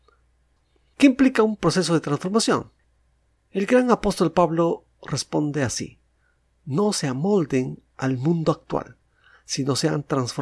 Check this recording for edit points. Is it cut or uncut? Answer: uncut